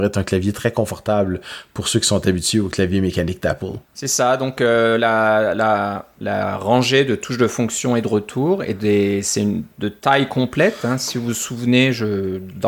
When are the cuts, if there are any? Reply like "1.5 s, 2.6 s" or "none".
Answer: 3.8 s